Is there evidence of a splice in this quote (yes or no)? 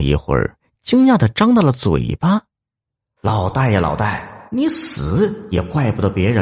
yes